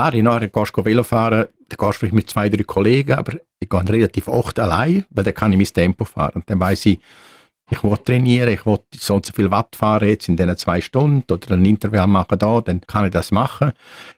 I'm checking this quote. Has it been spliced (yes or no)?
yes